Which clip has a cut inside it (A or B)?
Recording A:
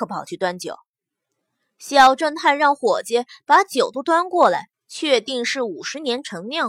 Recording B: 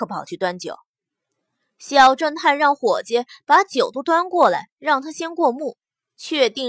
A